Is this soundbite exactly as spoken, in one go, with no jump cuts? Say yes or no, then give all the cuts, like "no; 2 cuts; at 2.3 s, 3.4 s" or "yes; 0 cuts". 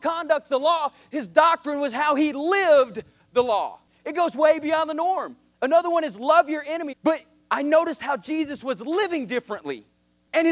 no; 2 cuts; at 4.0 s, 6.9 s